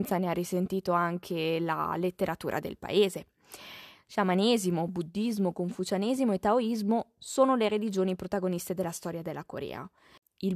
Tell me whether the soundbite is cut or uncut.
uncut